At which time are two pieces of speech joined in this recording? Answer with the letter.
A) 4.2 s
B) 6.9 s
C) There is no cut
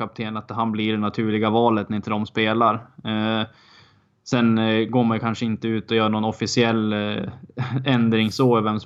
C